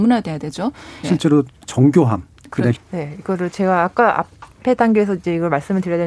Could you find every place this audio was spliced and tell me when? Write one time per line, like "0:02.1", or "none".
0:01.0
0:02.8